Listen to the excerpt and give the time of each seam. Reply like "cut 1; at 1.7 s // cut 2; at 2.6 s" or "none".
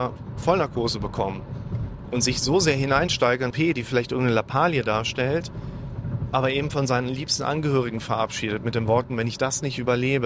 cut 1; at 3.5 s